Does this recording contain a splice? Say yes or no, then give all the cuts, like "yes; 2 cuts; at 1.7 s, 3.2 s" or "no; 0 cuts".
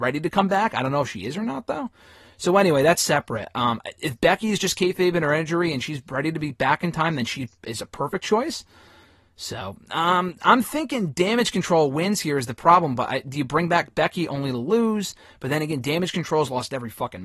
no; 0 cuts